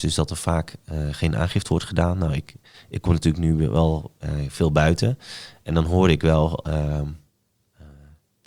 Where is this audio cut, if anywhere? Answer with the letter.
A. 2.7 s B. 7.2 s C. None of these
C